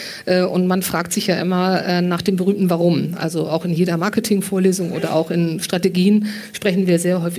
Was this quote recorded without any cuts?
yes; 0 cuts

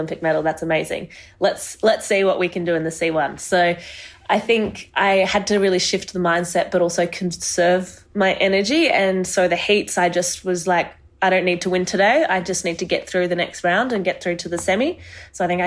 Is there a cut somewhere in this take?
no; 0 cuts

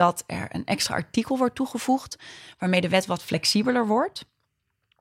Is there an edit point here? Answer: no; 0 cuts

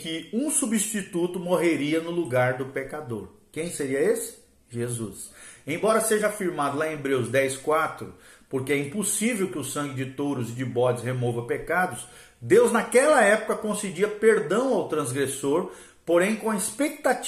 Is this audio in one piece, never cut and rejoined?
yes; 0 cuts

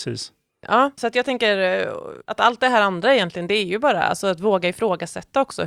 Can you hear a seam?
yes; 1 cut; at 0.9 s

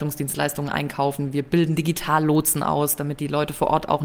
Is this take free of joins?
yes; 0 cuts

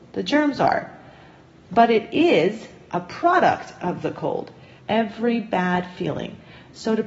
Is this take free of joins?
no; 1 cut; at 4.8 s

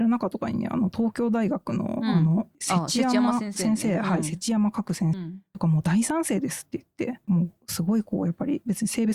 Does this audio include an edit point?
yes; 2 cuts; at 5.1 s, 7.2 s

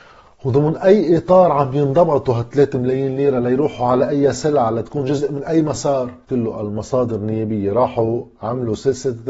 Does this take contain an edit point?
yes; 1 cut; at 6.2 s

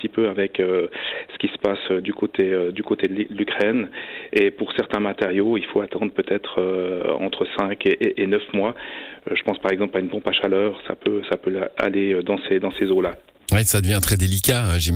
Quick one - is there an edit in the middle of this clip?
no; 0 cuts

